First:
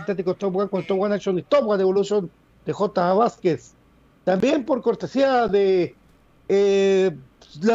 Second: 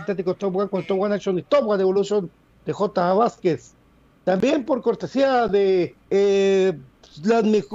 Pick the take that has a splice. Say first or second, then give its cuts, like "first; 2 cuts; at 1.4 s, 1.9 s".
second; 1 cut; at 6.0 s